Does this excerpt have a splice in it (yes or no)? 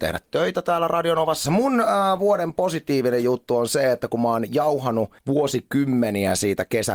yes